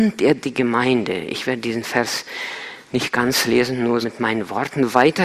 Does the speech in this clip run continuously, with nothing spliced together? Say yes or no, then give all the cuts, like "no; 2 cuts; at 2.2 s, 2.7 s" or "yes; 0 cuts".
no; 1 cut; at 4.0 s